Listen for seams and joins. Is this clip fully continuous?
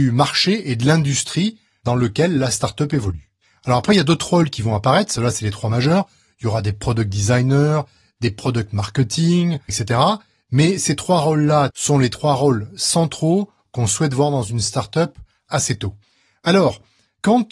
no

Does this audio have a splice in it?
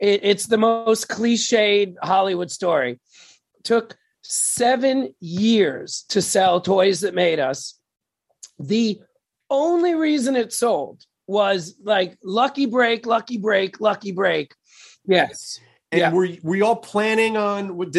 yes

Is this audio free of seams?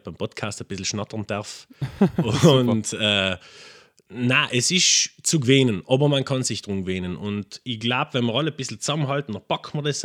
yes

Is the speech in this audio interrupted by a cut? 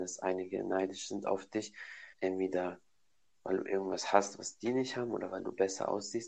yes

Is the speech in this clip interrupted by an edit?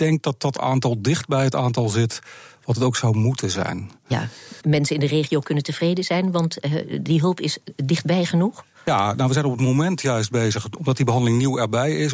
yes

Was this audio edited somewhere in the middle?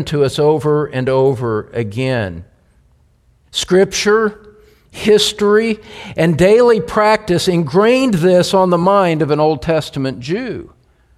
no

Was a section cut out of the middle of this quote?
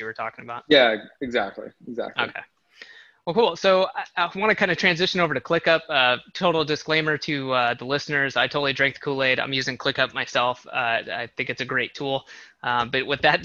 no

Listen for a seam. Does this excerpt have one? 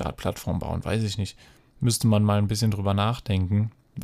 no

